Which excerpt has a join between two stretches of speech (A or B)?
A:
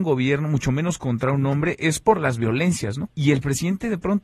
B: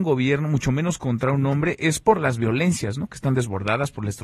A